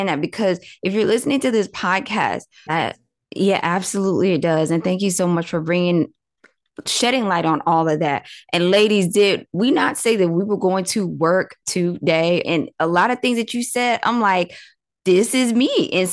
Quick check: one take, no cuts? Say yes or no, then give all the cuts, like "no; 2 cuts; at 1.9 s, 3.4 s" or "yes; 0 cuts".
no; 2 cuts; at 2.7 s, 12.4 s